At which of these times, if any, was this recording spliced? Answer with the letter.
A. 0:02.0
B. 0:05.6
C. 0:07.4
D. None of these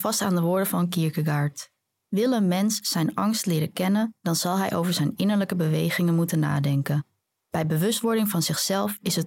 D